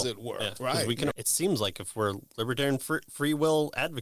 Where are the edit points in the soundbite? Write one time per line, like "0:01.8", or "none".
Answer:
0:01.1